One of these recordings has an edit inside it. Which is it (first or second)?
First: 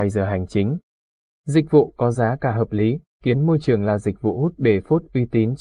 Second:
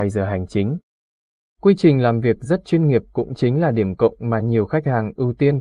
first